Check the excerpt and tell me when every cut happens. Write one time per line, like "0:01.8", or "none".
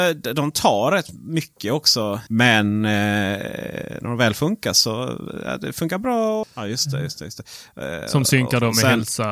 0:02.3
0:06.4